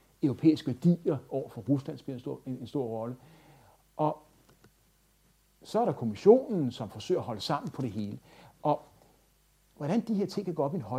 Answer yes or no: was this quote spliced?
no